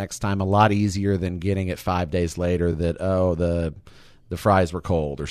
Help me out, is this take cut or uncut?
uncut